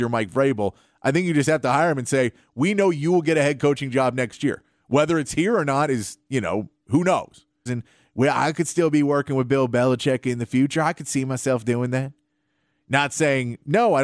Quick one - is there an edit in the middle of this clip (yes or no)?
yes